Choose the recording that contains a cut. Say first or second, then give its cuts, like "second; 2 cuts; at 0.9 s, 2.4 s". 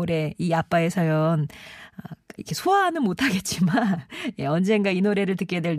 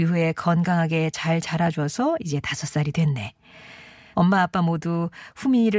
second; 1 cut; at 4.1 s